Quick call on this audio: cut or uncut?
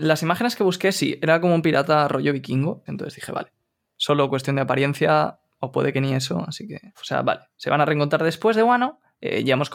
cut